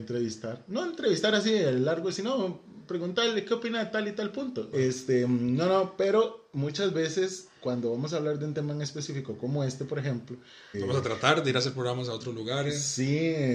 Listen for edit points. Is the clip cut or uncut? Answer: cut